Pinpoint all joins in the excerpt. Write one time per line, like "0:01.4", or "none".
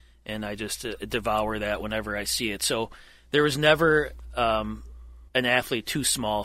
0:05.3